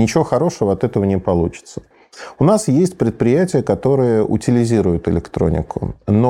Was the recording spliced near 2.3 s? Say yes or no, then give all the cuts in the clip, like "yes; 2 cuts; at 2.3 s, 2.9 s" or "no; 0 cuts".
no; 0 cuts